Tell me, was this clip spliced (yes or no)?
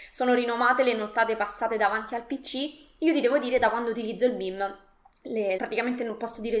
yes